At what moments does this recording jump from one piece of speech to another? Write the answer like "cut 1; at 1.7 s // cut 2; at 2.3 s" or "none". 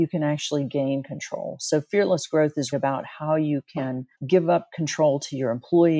cut 1; at 2.7 s // cut 2; at 4.1 s